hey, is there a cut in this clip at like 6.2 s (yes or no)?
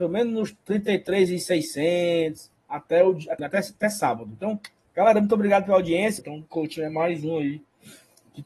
yes